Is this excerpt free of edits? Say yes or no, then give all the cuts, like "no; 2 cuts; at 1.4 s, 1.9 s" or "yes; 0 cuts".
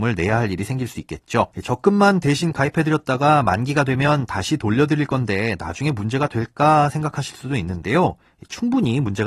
no; 1 cut; at 1.5 s